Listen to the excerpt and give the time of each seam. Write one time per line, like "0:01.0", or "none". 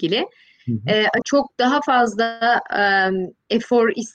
0:01.2